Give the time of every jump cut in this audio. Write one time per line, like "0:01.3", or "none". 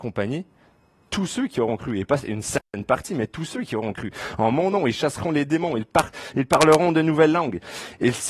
none